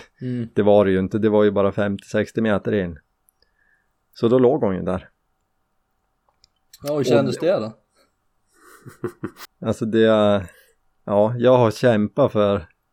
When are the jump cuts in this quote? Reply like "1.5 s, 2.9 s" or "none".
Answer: 9.4 s